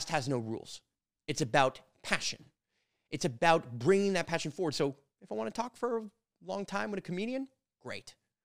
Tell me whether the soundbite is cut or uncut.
uncut